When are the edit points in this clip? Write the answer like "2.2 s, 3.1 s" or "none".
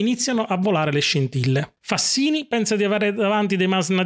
1.8 s